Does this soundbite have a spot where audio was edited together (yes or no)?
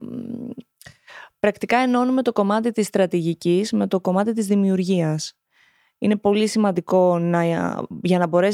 no